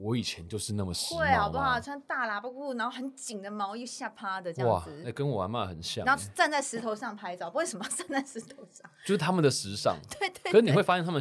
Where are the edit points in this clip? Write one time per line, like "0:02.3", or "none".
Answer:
none